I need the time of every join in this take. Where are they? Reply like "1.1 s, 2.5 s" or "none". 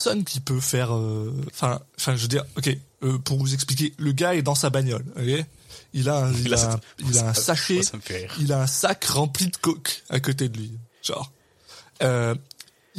none

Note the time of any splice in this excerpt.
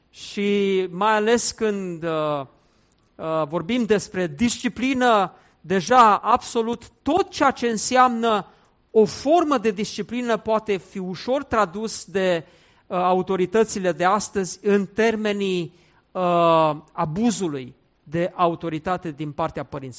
none

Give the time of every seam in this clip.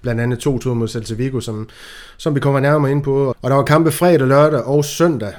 3.3 s

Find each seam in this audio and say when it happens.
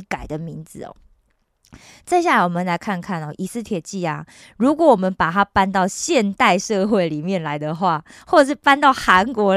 none

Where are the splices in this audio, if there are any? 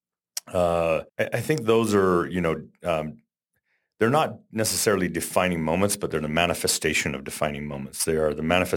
1.1 s

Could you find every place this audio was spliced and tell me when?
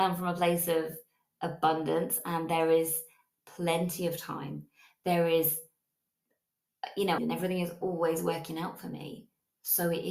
7.2 s

